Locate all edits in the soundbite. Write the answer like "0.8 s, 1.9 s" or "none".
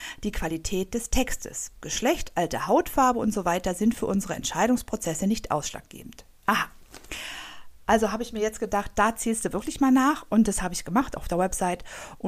6.4 s